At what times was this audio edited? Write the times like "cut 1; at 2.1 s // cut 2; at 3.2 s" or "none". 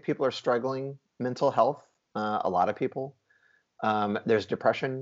none